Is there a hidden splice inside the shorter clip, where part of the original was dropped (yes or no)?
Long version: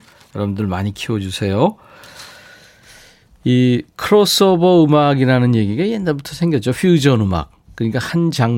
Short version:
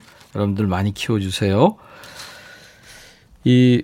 no